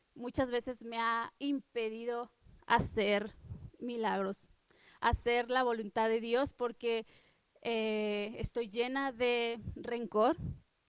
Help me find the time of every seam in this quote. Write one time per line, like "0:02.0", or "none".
0:01.4

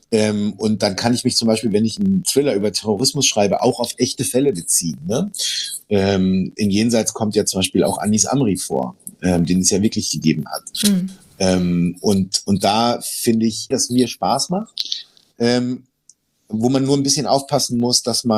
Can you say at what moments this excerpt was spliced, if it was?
0:13.7

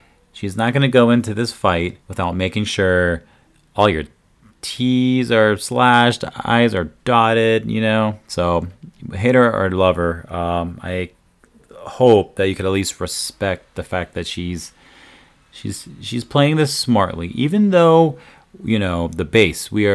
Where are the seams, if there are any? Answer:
0:02.0

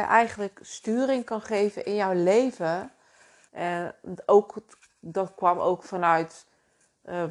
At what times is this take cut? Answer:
0:03.5

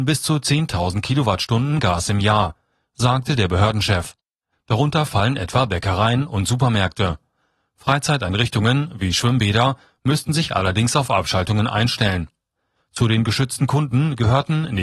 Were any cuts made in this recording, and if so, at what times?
0:04.5
0:12.8

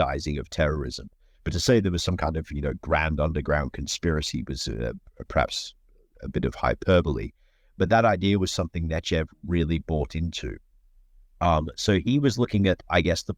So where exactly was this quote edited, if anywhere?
0:01.3

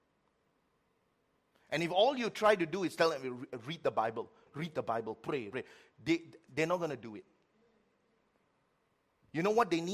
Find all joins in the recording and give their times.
0:04.5
0:05.5

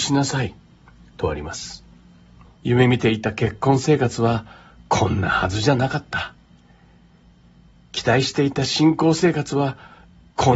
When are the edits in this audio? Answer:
0:02.4

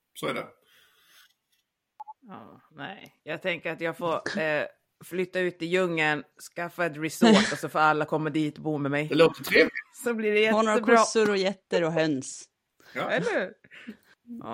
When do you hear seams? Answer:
none

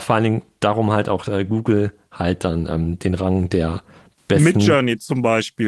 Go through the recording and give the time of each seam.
none

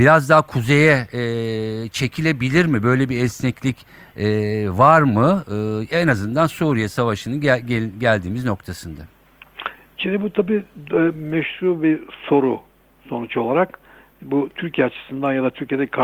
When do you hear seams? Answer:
0:10.0

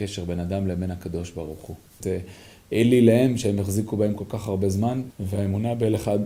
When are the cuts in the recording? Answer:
0:02.0
0:05.1

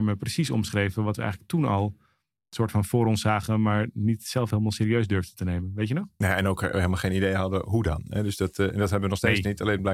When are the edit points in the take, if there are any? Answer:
none

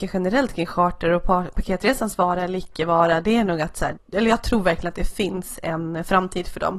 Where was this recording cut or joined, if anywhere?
0:04.0

